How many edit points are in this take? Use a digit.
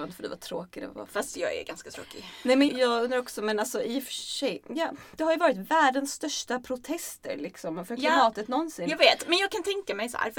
1